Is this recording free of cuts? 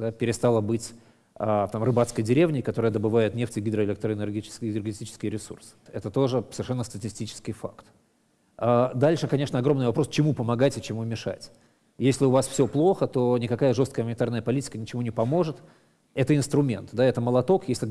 no; 1 cut; at 5.9 s

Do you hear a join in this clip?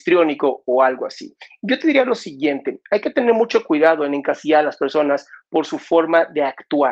no; 0 cuts

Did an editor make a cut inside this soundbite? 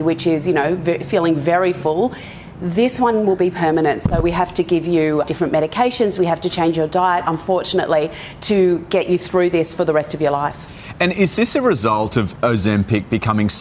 yes; 2 cuts; at 5.2 s, 12.4 s

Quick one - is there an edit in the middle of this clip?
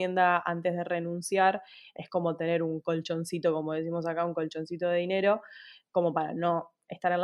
no; 0 cuts

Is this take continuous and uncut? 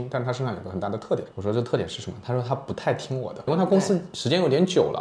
no; 2 cuts; at 1.3 s, 3.5 s

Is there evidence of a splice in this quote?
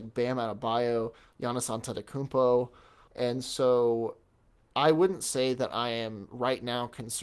yes; 2 cuts; at 1.3 s, 3.1 s

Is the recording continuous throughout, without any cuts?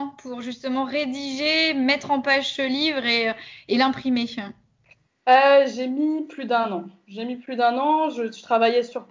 yes; 0 cuts

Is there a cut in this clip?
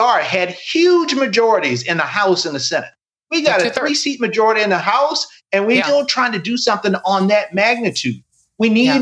yes; 1 cut; at 5.8 s

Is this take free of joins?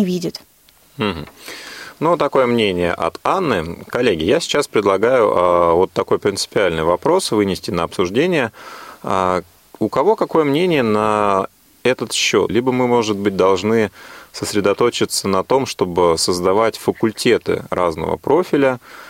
no; 1 cut; at 12.5 s

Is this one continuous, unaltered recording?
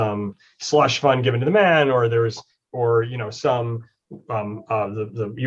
yes; 0 cuts

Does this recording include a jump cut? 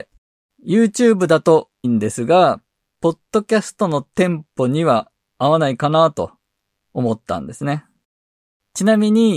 yes; 1 cut; at 1.8 s

